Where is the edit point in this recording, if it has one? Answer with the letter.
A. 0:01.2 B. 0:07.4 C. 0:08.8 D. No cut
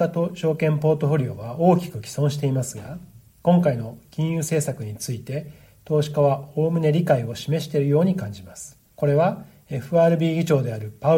C